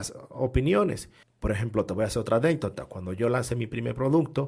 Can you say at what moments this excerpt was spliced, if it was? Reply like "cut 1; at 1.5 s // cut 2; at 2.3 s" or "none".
cut 1; at 1.2 s